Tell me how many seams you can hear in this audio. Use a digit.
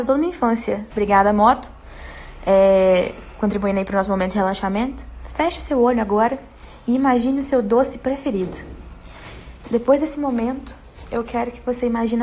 1